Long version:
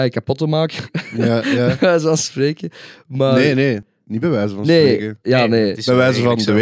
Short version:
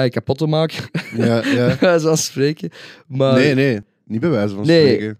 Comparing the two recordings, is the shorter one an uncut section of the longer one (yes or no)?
yes